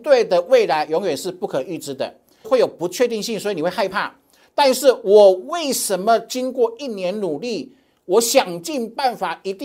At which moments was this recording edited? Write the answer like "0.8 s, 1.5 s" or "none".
2.4 s